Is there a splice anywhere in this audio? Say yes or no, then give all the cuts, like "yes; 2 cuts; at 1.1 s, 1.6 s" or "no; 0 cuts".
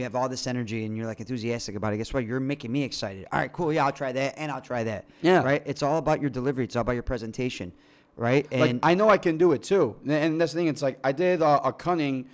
no; 0 cuts